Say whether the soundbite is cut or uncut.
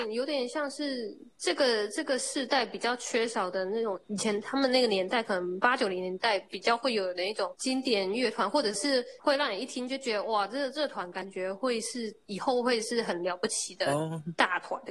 uncut